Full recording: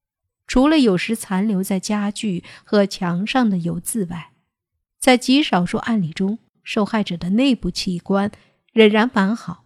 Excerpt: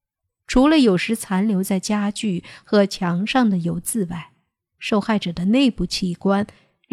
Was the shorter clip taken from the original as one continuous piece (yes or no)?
no